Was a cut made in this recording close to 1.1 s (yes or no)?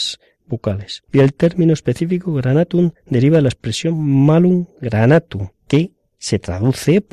yes